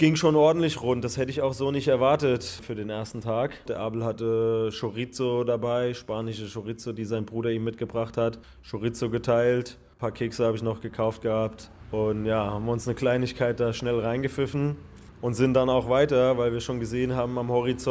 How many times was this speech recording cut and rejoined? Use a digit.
1